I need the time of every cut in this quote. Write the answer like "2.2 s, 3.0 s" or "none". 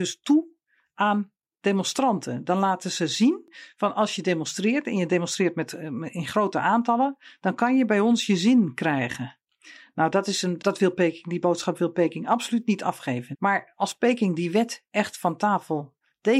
10.6 s, 13.3 s